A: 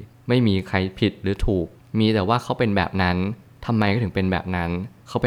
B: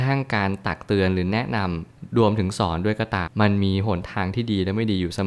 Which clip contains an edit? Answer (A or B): B